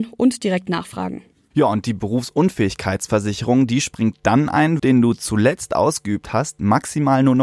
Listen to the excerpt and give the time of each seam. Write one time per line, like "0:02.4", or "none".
0:04.8